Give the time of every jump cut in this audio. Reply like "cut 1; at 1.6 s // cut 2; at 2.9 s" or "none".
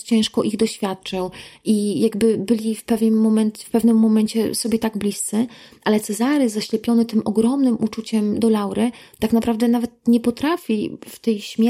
none